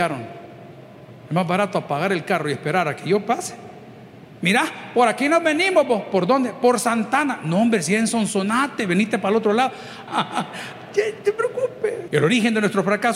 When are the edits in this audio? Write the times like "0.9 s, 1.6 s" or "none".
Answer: 10.1 s, 12.1 s